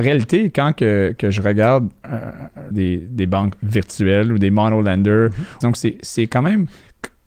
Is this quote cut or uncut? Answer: cut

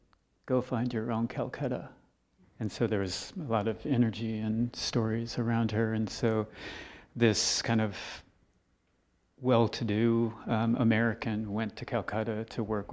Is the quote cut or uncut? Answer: cut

